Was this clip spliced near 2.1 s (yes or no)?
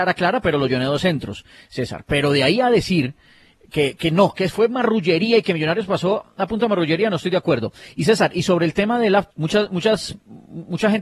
no